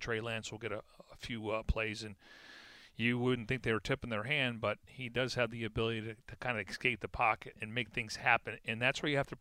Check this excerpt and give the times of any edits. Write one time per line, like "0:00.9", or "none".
0:07.5